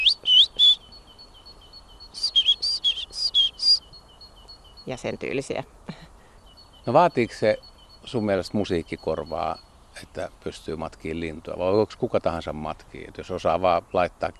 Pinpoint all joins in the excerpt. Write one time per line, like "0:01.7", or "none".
none